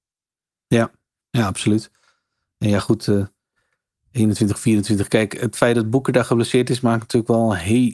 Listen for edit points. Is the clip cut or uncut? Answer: uncut